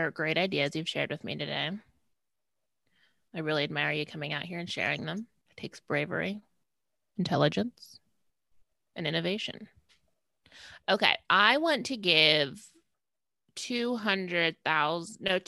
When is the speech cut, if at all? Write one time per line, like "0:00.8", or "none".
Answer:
none